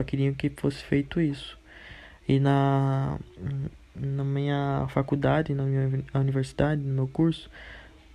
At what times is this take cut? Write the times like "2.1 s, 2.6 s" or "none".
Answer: none